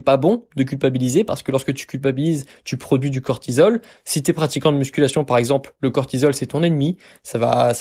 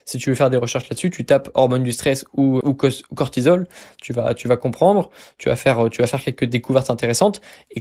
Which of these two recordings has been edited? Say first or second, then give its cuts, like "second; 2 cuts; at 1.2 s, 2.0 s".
second; 1 cut; at 2.6 s